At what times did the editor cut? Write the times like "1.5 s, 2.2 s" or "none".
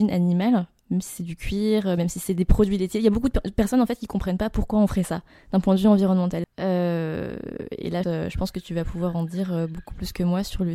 6.4 s, 8.0 s